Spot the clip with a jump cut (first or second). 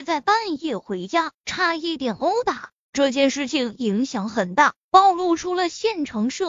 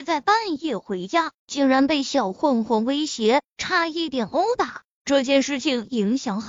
first